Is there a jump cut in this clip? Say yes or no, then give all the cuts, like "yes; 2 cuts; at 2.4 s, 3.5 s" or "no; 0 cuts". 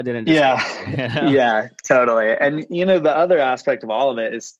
no; 0 cuts